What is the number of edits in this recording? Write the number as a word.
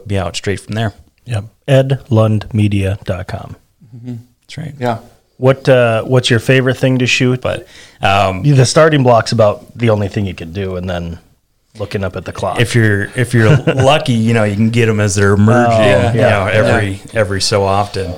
one